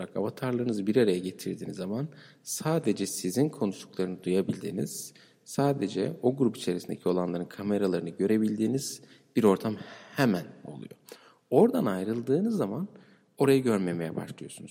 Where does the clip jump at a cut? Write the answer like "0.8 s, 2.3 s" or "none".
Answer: none